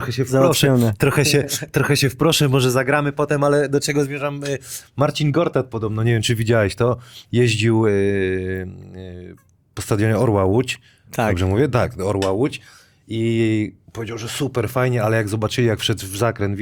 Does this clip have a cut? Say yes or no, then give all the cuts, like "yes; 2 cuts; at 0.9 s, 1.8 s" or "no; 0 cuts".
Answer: no; 0 cuts